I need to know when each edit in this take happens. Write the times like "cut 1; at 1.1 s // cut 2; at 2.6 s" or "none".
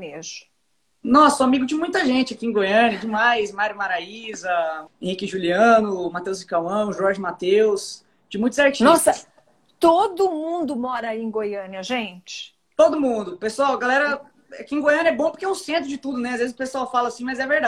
cut 1; at 4.9 s